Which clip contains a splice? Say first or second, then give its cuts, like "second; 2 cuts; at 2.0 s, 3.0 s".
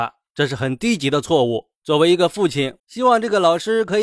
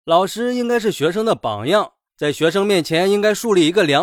first; 1 cut; at 2.8 s